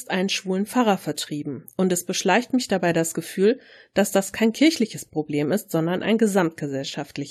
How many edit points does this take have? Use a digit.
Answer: 0